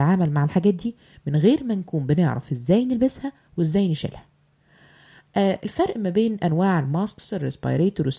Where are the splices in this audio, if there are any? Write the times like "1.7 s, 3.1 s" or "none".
none